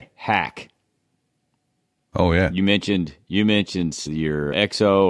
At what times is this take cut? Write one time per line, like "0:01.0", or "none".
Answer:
none